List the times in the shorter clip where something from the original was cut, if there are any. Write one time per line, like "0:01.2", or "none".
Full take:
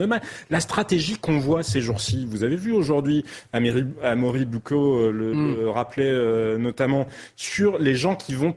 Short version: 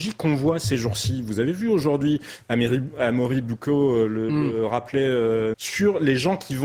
0:05.5